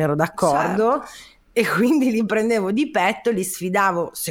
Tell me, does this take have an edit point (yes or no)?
no